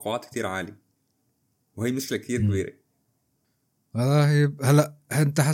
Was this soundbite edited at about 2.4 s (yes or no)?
no